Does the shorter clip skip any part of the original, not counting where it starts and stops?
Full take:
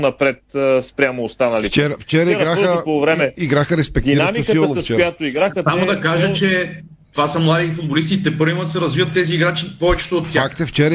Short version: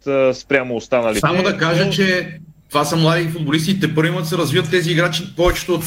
yes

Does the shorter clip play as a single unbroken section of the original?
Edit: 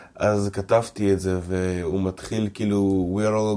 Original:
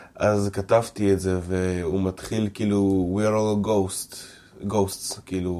yes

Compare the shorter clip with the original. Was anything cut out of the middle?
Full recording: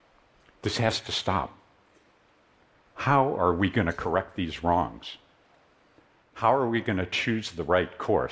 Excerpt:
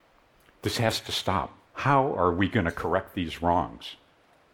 yes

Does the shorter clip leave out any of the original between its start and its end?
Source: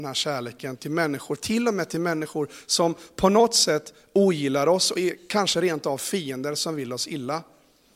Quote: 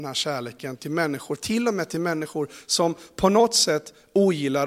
no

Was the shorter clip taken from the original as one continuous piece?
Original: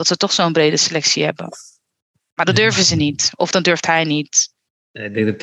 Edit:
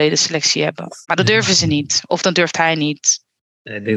no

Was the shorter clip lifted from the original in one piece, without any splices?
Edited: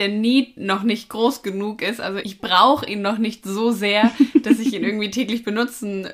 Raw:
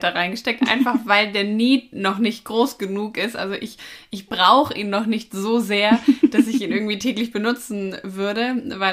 no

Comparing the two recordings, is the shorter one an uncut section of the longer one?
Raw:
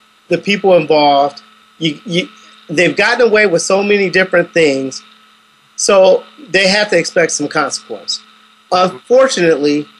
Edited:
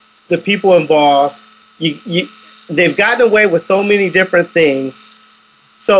yes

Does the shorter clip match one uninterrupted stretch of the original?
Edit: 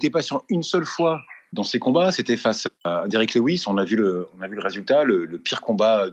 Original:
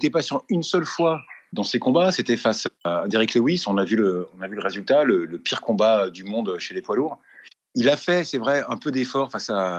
yes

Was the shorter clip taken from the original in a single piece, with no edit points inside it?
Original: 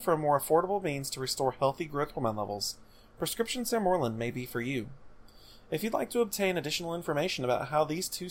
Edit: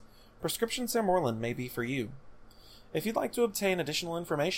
yes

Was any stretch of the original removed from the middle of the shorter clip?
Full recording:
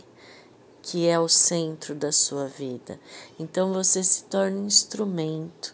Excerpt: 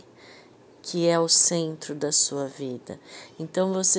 no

